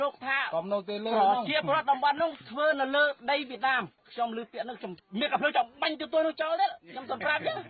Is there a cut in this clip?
no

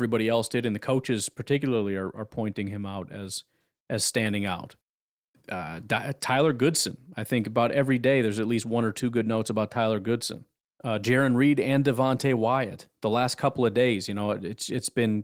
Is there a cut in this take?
no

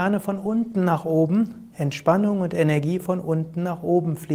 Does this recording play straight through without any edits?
no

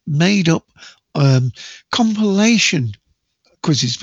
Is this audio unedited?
yes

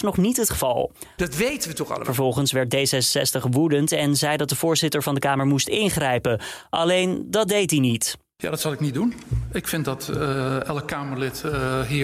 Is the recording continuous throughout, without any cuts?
no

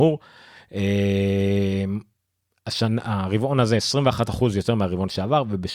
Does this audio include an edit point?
no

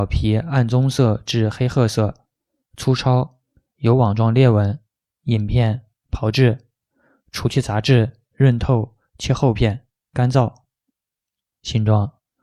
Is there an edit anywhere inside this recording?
yes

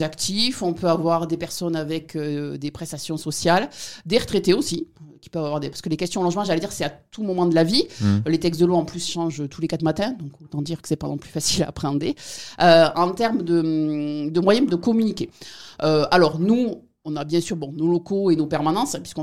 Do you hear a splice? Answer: no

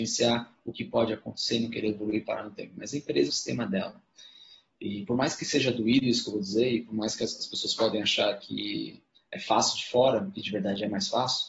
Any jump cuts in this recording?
yes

